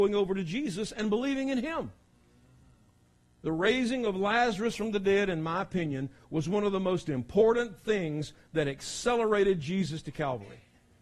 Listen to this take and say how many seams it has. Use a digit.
0